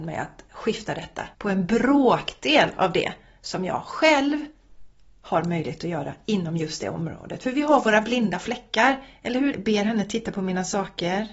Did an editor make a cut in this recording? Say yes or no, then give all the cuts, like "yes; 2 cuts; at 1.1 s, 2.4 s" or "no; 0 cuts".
yes; 2 cuts; at 1.3 s, 9.5 s